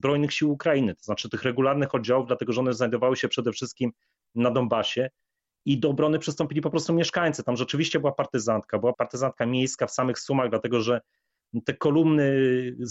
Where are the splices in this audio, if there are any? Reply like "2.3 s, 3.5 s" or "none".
8.9 s